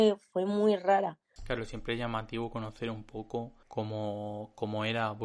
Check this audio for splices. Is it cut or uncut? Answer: cut